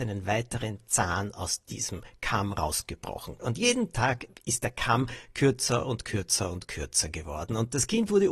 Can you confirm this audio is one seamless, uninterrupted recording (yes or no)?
no